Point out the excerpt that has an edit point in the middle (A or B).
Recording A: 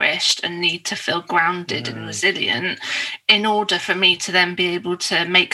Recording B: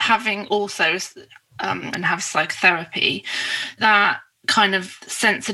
B